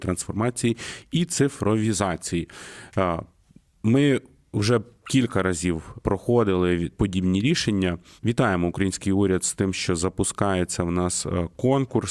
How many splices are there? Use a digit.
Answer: 0